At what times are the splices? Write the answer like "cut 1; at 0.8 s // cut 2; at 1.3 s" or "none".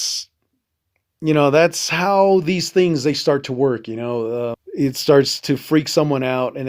cut 1; at 4.5 s